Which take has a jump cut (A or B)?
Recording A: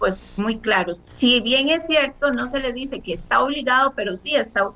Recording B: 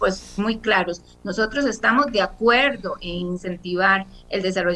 A